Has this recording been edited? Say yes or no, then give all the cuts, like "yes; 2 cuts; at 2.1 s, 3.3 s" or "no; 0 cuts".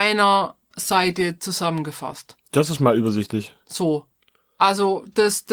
no; 0 cuts